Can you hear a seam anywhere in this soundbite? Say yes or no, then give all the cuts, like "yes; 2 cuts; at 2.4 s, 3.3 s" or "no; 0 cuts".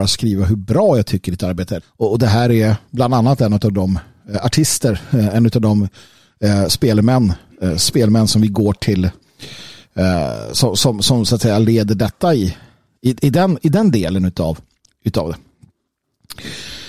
yes; 1 cut; at 1.8 s